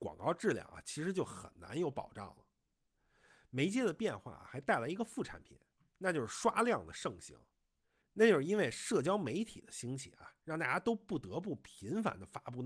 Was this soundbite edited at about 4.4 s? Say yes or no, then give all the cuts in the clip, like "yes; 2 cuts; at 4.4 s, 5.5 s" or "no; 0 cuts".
no; 1 cut; at 8.0 s